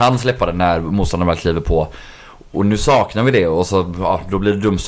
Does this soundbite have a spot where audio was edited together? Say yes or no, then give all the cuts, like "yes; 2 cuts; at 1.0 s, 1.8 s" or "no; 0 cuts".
no; 0 cuts